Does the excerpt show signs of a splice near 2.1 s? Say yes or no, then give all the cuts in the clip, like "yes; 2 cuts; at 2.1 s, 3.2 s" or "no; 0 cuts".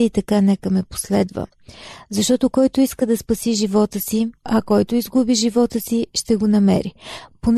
no; 1 cut; at 4.4 s